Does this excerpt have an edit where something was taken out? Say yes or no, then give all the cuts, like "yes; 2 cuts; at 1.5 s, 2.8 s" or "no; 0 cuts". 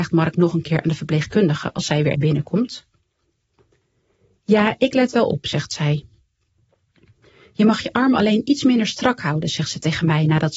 yes; 1 cut; at 2.1 s